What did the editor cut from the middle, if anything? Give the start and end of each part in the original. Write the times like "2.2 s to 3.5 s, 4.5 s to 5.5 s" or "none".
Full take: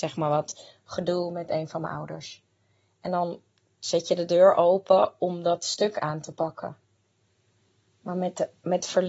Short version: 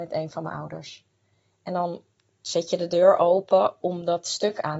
none